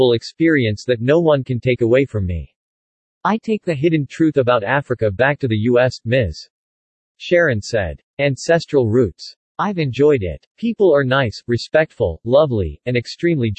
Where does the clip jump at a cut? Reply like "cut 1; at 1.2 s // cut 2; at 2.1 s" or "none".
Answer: cut 1; at 9.4 s